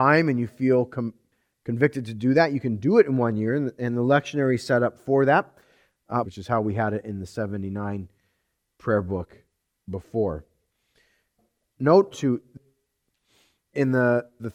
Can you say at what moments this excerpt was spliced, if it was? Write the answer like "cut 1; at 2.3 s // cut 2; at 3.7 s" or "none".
cut 1; at 6.2 s // cut 2; at 12.1 s